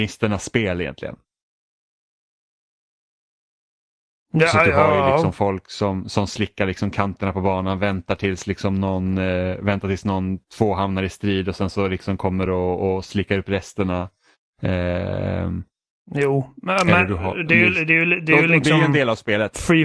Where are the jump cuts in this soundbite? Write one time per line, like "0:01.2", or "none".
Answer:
none